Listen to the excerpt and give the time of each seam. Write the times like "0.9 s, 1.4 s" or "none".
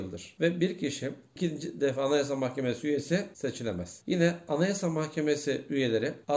none